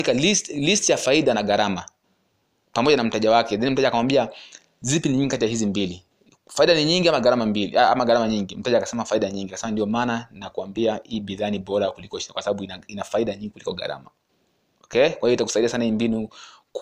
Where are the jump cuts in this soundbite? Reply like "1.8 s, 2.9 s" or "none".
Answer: none